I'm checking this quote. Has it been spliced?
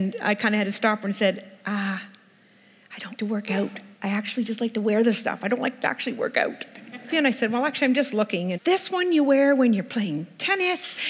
yes; 3 cuts; at 3.2 s, 7.1 s, 8.5 s

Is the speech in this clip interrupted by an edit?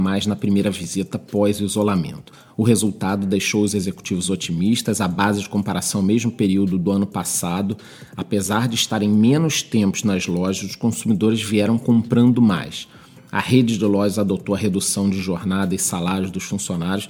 no; 0 cuts

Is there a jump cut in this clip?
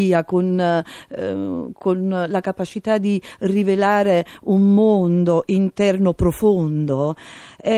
no; 0 cuts

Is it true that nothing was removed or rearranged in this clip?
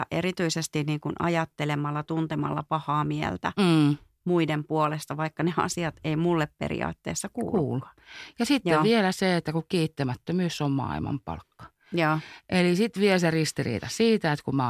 yes; 0 cuts

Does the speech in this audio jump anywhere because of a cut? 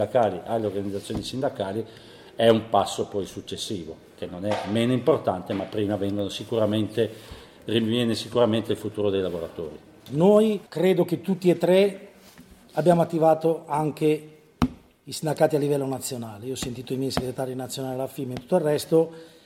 no; 0 cuts

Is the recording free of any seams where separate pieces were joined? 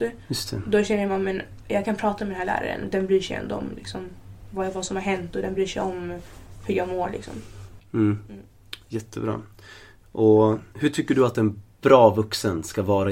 no; 1 cut; at 10.7 s

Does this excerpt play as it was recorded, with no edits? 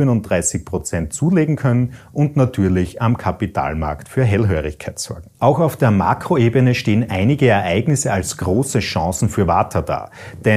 no; 1 cut; at 5.3 s

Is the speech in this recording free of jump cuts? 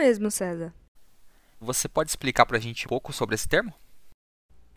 no; 2 cuts; at 1.6 s, 2.8 s

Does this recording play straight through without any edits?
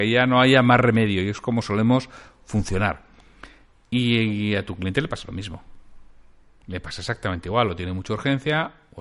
yes; 0 cuts

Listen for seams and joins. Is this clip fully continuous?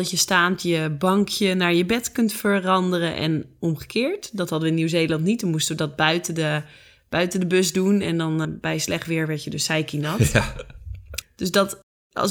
no; 2 cuts; at 8.4 s, 11.2 s

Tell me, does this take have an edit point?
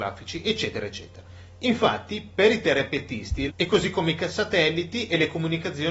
yes; 1 cut; at 3.5 s

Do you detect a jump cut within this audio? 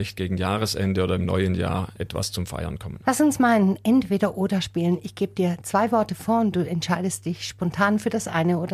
yes; 1 cut; at 3.0 s

